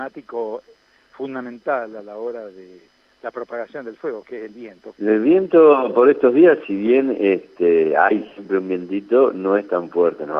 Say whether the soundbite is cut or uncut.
cut